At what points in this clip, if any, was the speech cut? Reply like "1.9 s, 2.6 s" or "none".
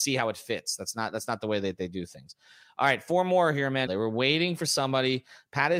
3.9 s